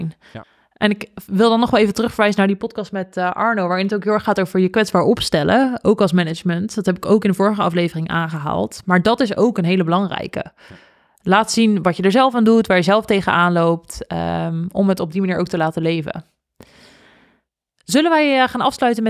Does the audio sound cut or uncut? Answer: uncut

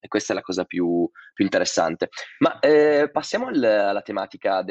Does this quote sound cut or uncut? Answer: uncut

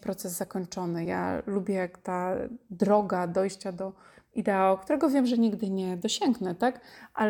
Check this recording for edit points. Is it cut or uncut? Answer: uncut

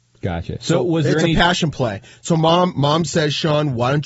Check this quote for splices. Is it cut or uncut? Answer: uncut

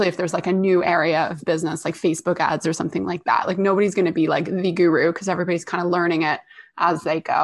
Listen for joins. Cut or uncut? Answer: uncut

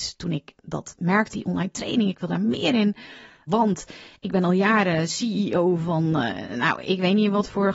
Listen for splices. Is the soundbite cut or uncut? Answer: cut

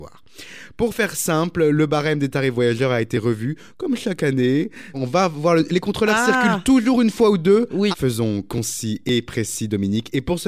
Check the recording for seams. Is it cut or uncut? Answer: cut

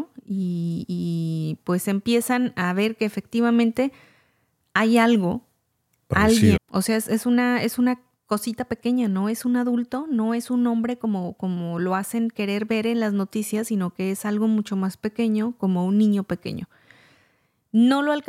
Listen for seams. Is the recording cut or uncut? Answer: cut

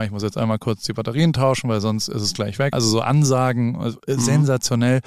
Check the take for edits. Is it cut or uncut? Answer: cut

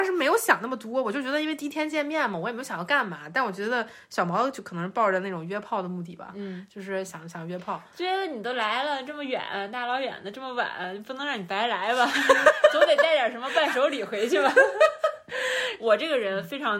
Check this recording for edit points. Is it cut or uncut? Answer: uncut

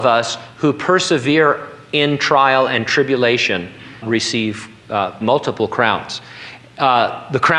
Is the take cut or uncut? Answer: cut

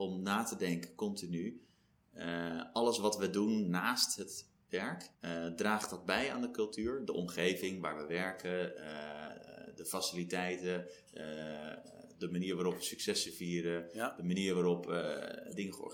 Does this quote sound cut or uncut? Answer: cut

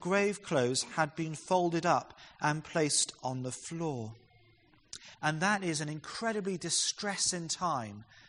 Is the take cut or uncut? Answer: cut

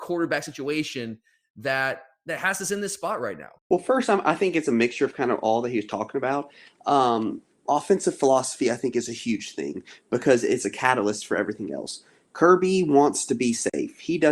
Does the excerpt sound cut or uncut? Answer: cut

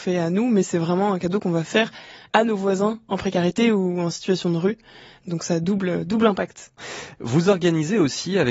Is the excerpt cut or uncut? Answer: uncut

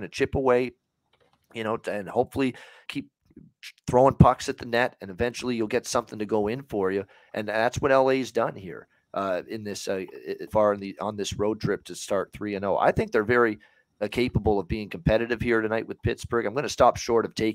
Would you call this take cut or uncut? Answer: cut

